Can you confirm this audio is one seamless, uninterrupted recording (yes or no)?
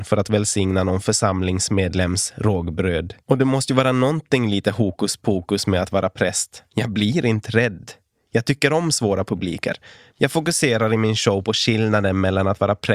no